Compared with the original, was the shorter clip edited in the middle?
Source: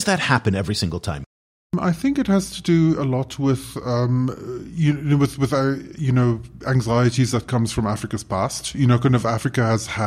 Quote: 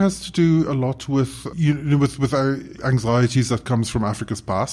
yes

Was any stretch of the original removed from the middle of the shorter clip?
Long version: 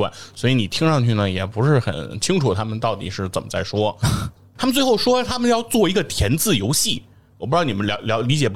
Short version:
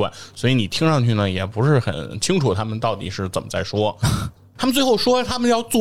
no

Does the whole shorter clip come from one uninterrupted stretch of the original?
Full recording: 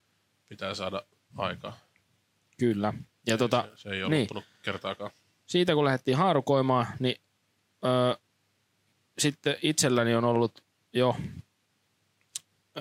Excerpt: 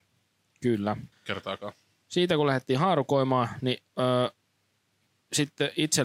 no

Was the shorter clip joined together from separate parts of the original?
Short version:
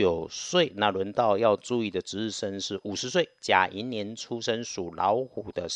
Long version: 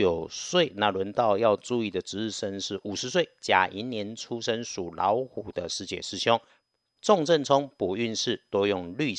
no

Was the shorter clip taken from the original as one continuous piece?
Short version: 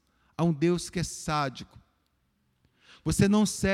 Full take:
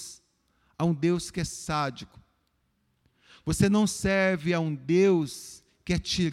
yes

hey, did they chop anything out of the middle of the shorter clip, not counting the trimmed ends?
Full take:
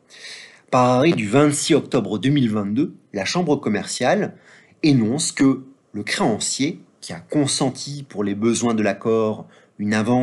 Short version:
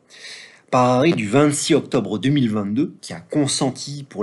yes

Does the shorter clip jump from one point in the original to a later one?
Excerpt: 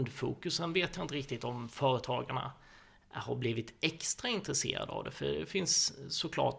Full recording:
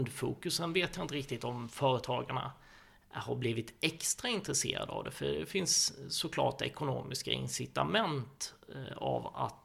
no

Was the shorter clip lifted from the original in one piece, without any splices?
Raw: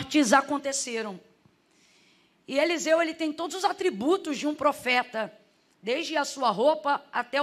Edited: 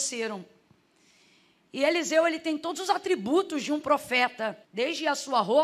no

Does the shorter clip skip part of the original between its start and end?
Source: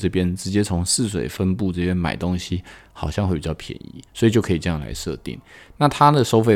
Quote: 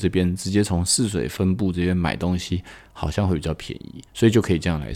no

